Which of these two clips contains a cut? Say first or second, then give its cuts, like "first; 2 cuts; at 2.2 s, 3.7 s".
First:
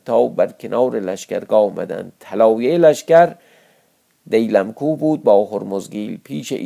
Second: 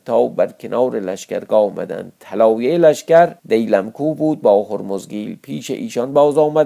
second; 1 cut; at 3.4 s